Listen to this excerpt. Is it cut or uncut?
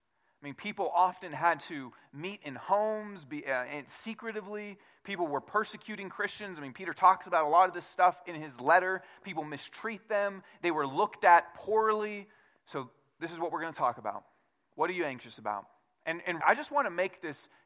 cut